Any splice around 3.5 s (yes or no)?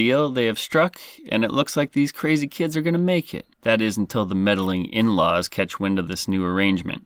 yes